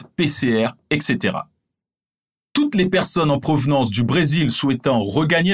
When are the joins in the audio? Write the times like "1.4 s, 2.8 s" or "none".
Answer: none